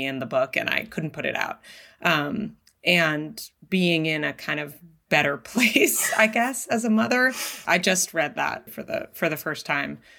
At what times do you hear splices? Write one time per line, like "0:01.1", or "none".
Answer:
0:07.7
0:08.7